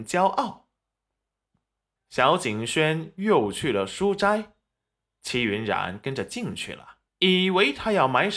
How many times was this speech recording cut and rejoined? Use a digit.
2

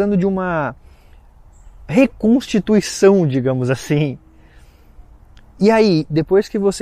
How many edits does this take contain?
0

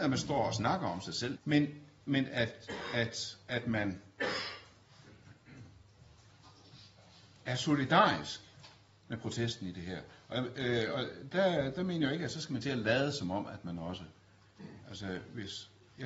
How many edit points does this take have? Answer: 1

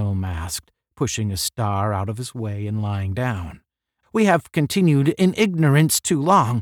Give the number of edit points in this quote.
1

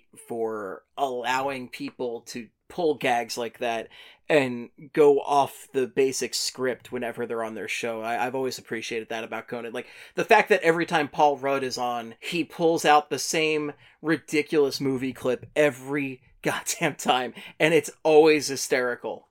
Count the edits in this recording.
1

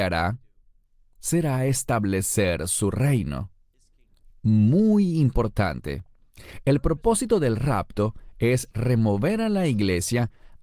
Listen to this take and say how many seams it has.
0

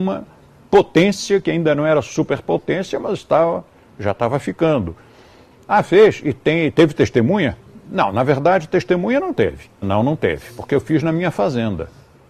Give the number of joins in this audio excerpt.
2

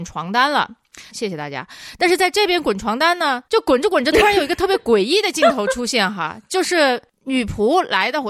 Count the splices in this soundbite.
2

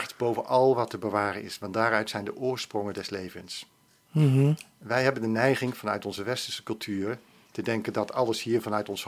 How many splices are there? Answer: 0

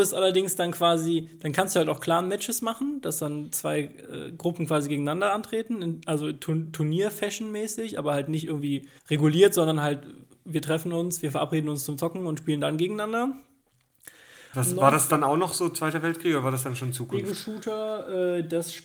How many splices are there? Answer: 2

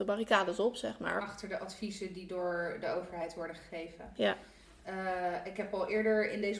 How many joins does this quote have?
1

